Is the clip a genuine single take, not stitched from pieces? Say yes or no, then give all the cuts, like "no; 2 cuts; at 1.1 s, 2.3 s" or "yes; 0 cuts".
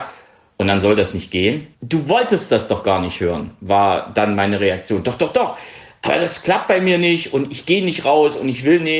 no; 1 cut; at 1.7 s